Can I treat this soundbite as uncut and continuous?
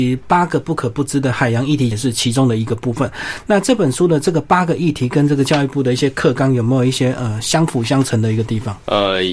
no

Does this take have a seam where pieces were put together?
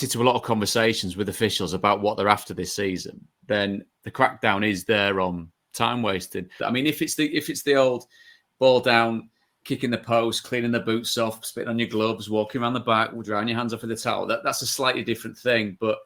yes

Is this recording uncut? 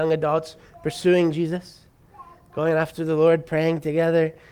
yes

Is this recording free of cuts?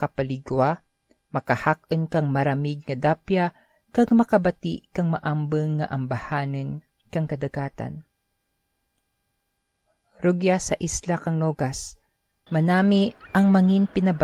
yes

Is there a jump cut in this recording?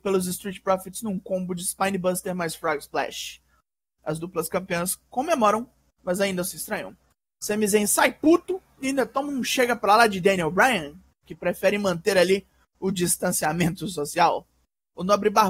no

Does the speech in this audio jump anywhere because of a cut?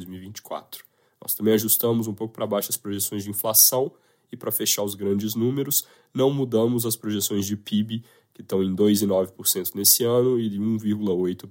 no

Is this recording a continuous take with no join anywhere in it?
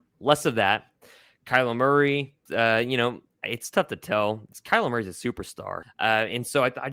no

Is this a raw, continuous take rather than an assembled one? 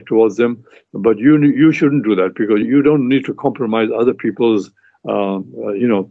no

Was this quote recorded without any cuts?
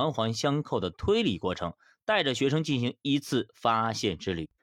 yes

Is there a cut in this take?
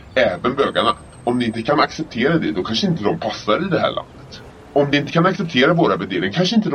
yes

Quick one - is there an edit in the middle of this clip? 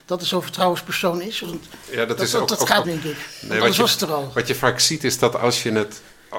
yes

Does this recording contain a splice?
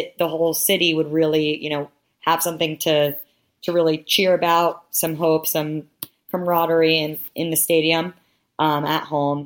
no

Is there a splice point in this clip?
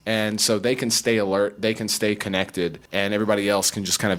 yes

